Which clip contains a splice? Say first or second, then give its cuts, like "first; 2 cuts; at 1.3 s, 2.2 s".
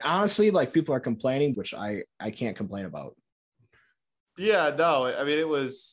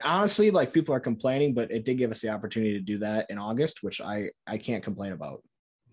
first; 1 cut; at 1.5 s